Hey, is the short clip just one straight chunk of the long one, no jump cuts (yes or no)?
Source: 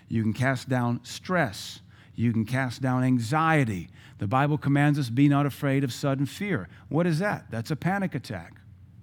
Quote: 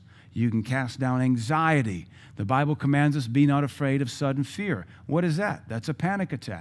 yes